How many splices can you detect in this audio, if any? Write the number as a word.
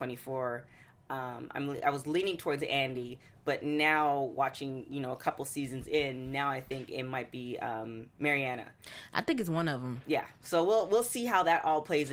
zero